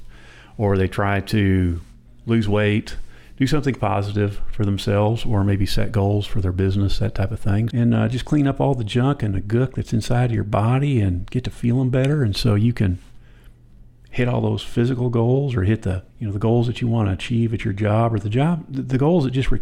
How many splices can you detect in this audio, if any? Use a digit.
2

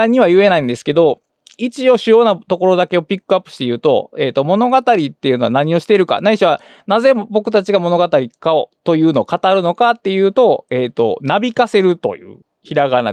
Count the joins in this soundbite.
0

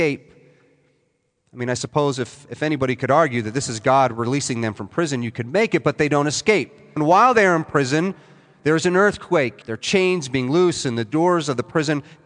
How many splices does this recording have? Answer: 2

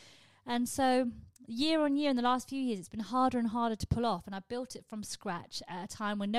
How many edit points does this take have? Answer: 1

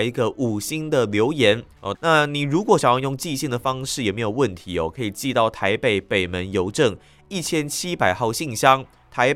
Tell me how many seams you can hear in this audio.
1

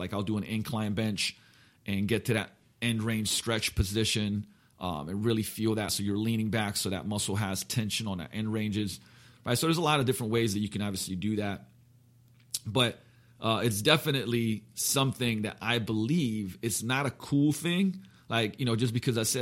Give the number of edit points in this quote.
0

